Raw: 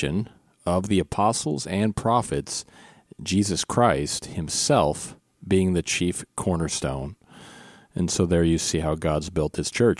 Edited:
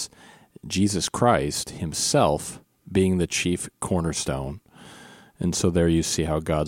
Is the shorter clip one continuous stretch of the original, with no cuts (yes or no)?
yes